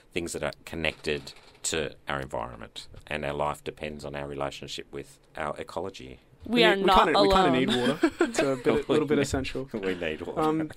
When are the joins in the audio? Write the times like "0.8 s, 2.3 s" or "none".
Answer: 5.3 s